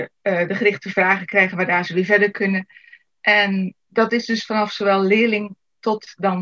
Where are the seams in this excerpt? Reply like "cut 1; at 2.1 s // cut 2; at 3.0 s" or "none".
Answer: none